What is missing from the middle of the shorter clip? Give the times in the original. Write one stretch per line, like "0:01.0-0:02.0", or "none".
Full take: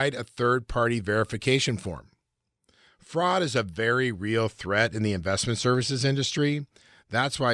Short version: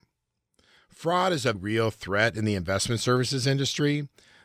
0:03.6-0:04.1